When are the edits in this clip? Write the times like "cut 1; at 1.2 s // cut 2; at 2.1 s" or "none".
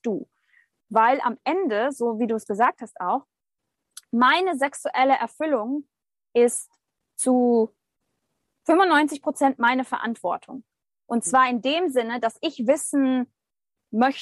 none